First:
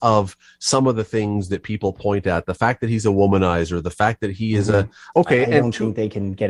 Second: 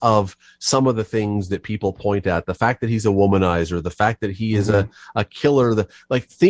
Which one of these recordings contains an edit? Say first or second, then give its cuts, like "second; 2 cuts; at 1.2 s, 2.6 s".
first; 1 cut; at 5.1 s